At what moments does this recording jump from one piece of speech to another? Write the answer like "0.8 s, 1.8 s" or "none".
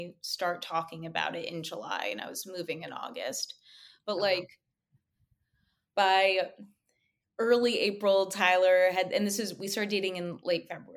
none